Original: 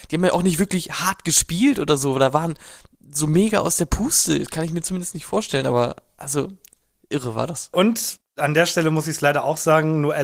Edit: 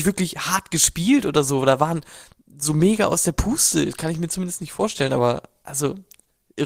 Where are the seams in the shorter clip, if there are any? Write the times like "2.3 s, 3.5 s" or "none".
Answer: none